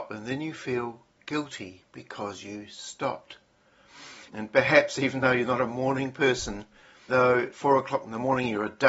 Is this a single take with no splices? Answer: no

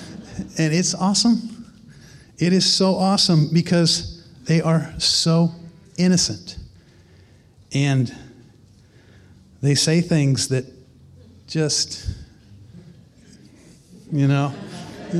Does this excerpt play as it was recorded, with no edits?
yes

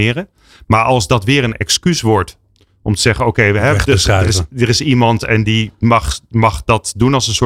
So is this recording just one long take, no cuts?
yes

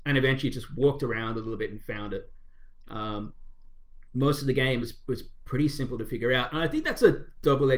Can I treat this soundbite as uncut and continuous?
yes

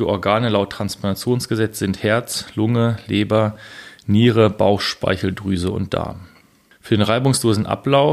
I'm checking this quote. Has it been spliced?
no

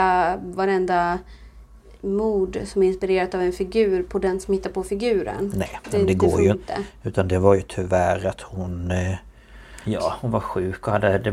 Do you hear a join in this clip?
yes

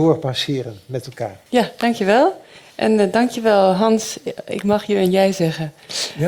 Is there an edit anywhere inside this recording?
yes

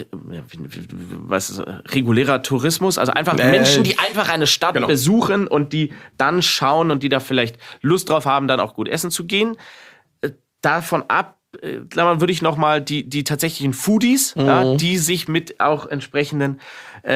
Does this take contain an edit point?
no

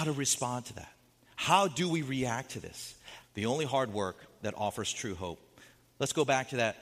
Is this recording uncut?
no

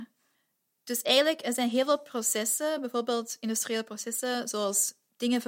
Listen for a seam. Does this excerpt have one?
no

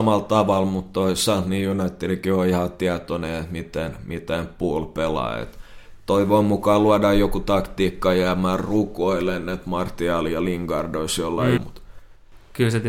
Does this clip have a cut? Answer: yes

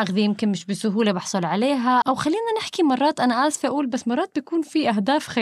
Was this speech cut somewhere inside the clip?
yes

